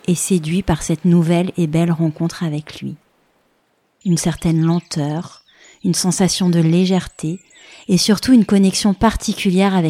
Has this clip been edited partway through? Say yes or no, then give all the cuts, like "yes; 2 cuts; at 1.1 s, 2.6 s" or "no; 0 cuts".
yes; 1 cut; at 4.0 s